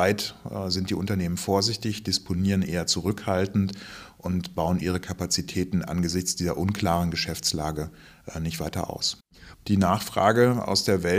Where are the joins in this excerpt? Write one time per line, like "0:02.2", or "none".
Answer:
0:04.8
0:09.5